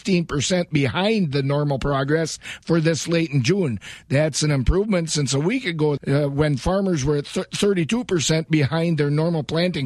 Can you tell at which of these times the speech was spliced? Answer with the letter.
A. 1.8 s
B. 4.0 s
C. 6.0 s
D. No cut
C